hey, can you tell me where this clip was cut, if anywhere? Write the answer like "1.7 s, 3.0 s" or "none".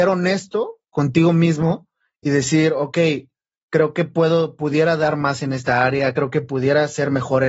none